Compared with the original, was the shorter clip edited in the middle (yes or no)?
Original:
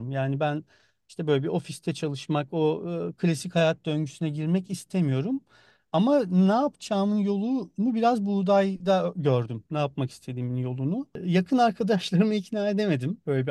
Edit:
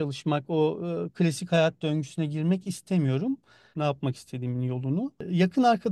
yes